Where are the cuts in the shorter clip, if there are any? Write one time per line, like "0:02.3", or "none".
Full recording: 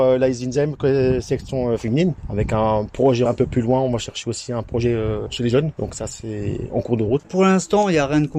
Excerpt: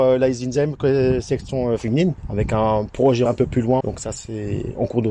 0:03.8